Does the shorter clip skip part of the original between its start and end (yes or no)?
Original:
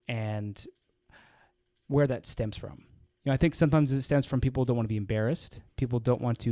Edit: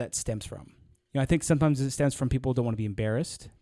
no